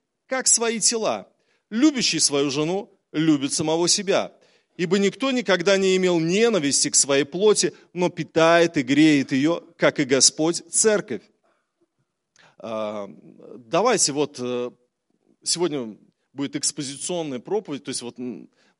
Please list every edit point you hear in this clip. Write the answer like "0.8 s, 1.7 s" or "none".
12.4 s